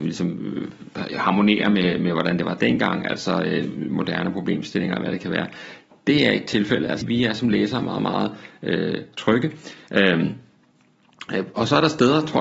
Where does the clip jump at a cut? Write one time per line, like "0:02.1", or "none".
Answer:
0:07.0